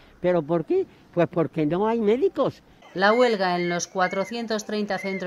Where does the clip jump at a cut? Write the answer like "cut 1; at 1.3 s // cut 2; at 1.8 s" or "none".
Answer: none